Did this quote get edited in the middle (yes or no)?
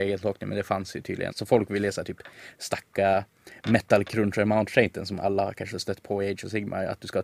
yes